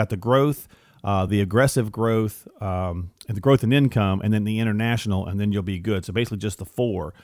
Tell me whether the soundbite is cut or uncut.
uncut